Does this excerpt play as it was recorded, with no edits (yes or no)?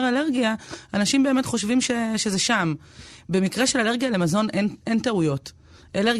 yes